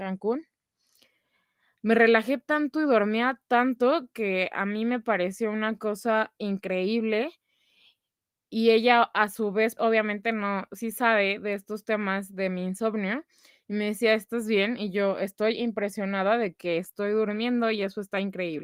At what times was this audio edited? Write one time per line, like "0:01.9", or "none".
0:09.8